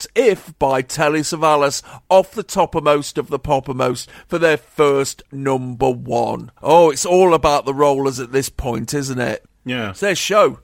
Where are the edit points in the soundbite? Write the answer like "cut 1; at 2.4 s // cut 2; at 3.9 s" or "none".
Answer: cut 1; at 6.6 s